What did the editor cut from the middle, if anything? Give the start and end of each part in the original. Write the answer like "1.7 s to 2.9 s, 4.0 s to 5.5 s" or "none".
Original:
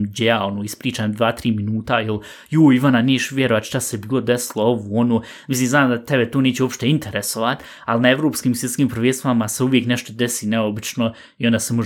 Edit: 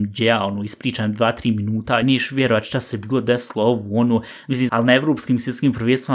2.0 s to 3.0 s, 5.7 s to 7.9 s